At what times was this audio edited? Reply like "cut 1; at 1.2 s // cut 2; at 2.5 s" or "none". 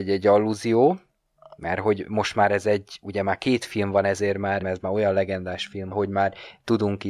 cut 1; at 4.6 s // cut 2; at 5.9 s